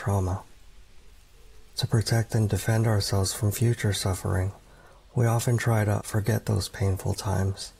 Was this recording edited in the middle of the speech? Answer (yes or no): no